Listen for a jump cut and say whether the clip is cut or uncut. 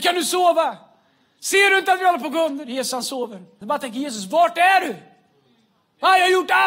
cut